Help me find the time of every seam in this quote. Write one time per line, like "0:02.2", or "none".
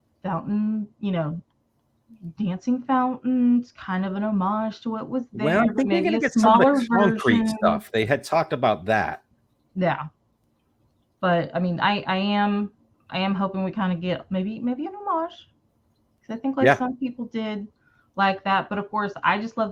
none